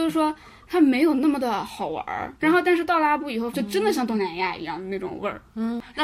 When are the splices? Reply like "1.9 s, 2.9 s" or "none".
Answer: 2.4 s, 3.5 s